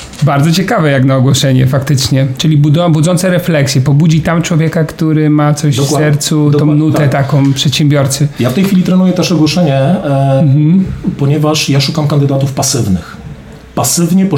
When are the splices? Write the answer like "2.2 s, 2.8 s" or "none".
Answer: none